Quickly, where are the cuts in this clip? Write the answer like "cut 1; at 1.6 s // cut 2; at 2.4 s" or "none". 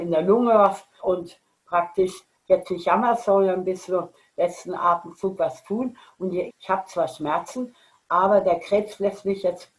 cut 1; at 1.0 s // cut 2; at 6.5 s